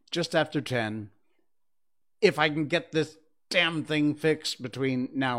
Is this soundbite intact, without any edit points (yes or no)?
yes